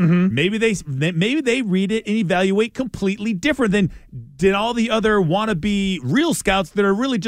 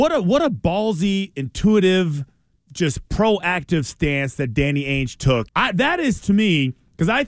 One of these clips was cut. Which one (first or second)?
second